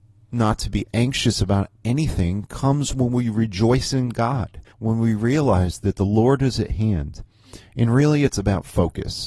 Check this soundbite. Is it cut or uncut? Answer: cut